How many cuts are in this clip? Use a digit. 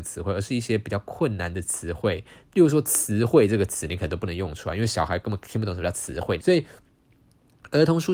1